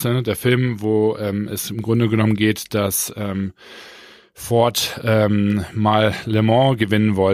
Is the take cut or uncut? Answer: uncut